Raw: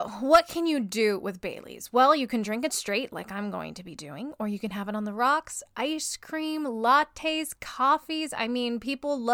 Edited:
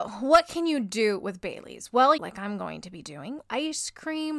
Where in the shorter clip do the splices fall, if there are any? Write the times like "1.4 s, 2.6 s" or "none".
2.2 s, 3.4 s